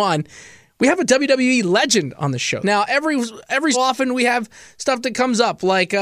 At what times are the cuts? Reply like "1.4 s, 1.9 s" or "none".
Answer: 2.6 s, 3.7 s